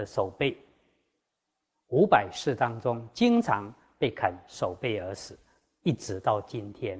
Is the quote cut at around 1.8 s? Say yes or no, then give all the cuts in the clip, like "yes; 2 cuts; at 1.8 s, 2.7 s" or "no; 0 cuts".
no; 0 cuts